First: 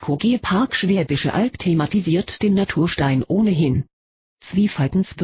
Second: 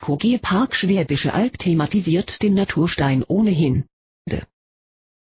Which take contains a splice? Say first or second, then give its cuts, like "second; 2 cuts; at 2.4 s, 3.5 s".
second; 1 cut; at 4.1 s